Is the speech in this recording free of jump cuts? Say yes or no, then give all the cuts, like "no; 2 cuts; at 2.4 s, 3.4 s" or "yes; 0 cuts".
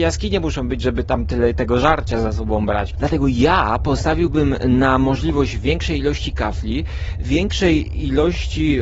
no; 1 cut; at 3.0 s